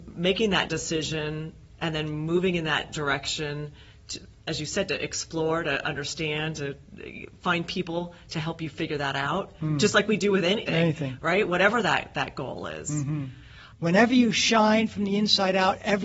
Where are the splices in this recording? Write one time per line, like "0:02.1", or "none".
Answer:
0:10.7
0:13.7